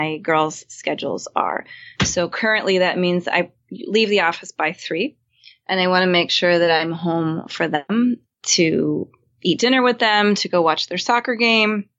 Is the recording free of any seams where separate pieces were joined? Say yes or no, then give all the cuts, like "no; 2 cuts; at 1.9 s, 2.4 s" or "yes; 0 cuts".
yes; 0 cuts